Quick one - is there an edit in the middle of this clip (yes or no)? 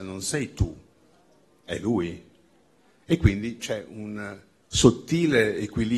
no